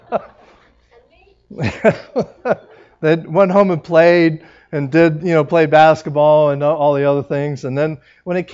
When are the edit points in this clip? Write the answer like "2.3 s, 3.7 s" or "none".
none

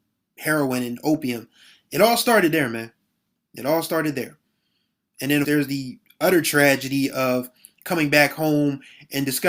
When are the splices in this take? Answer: 5.4 s

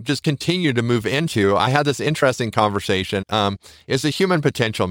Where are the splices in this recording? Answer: 3.2 s

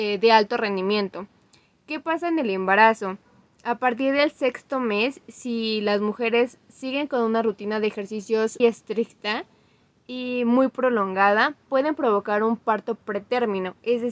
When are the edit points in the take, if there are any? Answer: 8.6 s

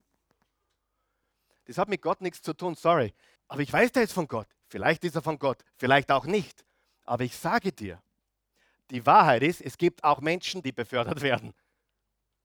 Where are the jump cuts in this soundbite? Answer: 3.4 s, 10.6 s

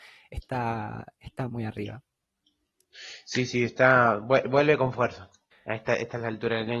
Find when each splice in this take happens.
1.5 s

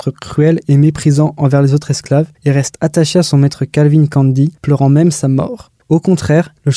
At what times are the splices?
5.8 s

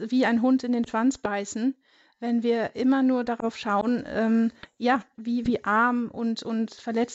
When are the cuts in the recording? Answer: 5.1 s

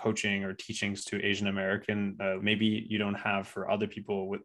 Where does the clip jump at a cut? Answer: 2.4 s

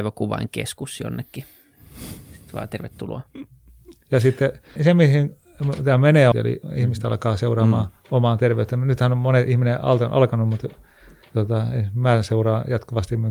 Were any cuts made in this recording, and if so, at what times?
4.8 s, 6.3 s, 8.0 s

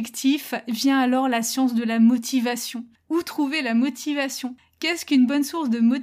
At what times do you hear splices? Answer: none

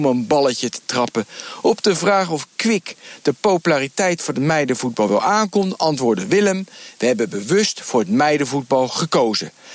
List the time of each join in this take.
none

